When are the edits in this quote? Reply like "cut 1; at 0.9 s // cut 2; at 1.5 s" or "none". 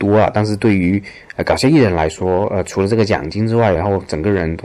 cut 1; at 3.8 s